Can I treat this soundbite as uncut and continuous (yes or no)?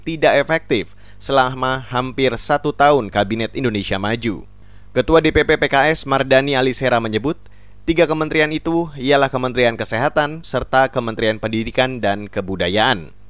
no